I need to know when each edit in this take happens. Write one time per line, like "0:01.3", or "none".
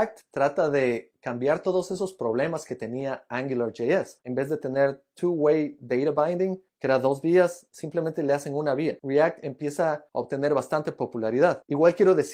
0:09.0